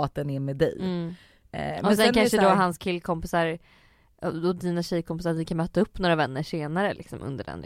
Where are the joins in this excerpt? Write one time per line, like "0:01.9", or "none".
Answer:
none